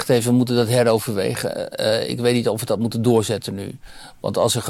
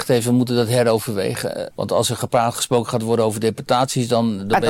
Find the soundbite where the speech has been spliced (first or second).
second